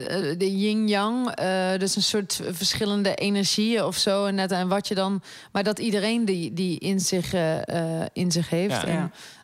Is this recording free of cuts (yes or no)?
yes